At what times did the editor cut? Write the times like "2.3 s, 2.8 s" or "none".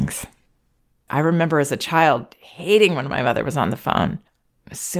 1.1 s